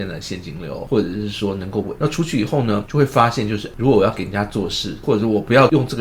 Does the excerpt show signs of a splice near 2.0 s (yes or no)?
yes